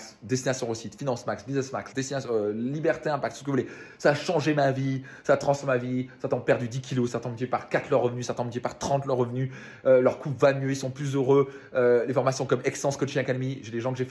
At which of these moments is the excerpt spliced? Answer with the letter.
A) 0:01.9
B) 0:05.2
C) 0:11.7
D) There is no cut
A